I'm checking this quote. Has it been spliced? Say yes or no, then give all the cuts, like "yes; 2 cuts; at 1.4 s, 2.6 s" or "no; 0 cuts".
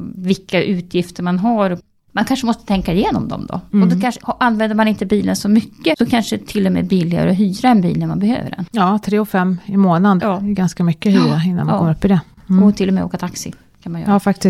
yes; 1 cut; at 10.2 s